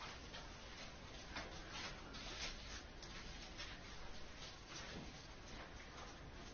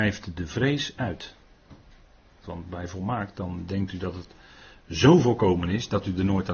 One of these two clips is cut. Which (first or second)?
second